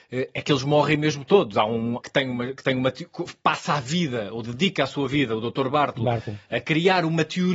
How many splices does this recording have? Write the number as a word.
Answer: one